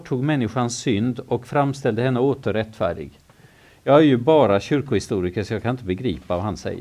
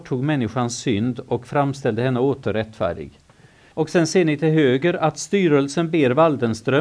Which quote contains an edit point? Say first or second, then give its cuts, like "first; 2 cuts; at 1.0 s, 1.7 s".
second; 1 cut; at 3.7 s